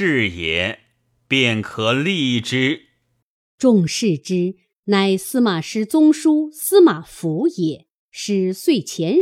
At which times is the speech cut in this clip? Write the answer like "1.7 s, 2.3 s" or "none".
none